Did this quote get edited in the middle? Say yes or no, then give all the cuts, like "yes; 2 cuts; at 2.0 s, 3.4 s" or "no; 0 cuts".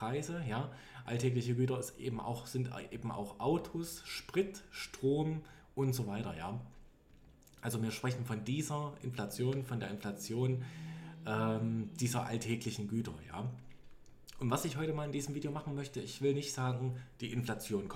no; 0 cuts